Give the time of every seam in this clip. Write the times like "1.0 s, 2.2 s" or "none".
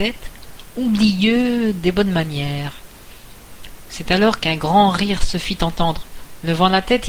none